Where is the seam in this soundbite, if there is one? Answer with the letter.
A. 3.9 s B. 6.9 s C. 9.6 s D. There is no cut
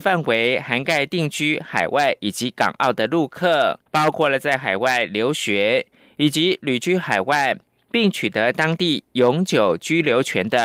A